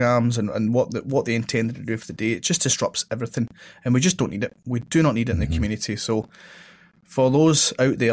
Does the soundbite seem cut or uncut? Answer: uncut